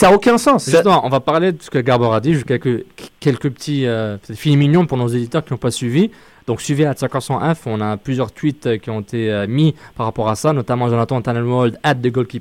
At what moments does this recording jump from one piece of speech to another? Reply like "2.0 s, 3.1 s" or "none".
none